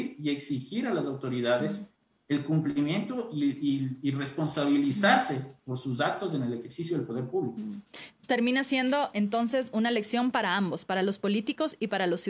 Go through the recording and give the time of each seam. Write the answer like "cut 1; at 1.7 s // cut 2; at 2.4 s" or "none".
none

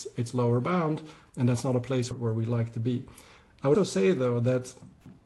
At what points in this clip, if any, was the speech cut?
cut 1; at 2.1 s // cut 2; at 3.7 s

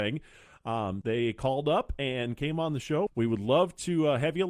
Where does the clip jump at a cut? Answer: cut 1; at 1.0 s // cut 2; at 3.1 s

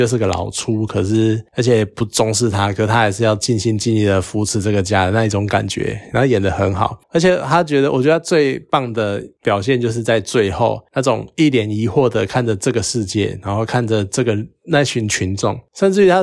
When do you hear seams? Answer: none

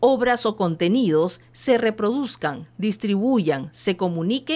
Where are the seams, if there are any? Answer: none

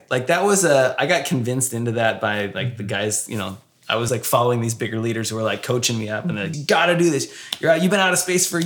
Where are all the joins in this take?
cut 1; at 4.1 s // cut 2; at 6.5 s

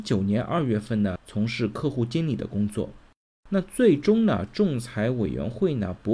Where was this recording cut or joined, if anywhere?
cut 1; at 1.2 s // cut 2; at 3.4 s

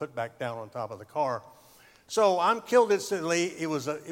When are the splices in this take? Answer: none

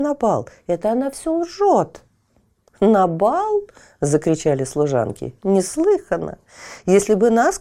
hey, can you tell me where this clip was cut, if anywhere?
cut 1; at 2.7 s

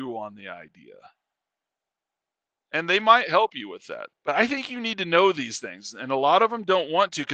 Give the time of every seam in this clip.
cut 1; at 4.1 s

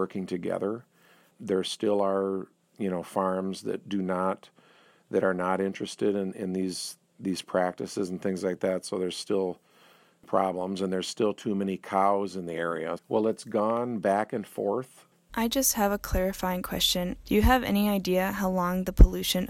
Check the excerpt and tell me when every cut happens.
cut 1; at 13.0 s // cut 2; at 15.3 s // cut 3; at 17.2 s

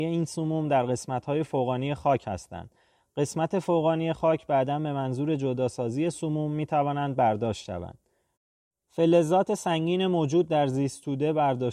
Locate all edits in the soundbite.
none

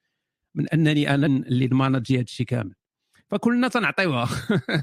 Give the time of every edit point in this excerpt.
cut 1; at 1.3 s

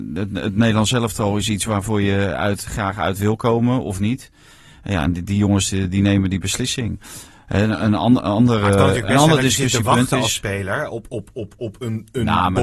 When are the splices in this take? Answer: cut 1; at 2.7 s

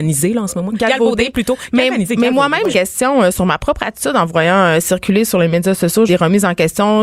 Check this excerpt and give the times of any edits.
cut 1; at 2.7 s // cut 2; at 6.1 s

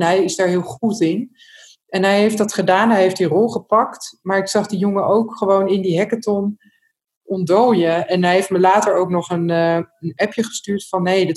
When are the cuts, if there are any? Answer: none

